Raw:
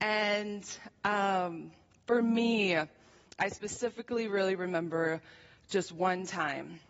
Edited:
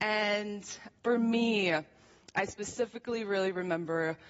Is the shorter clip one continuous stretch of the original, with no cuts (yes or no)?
no